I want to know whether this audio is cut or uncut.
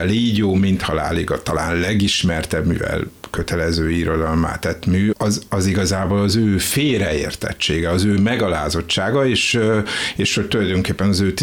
cut